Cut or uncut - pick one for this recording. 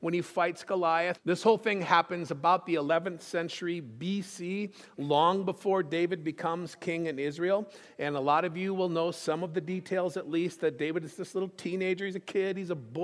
cut